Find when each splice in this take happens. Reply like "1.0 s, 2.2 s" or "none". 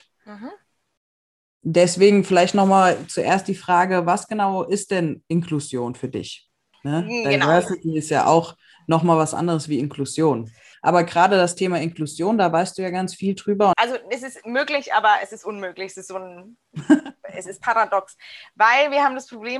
6.7 s, 10.7 s, 13.7 s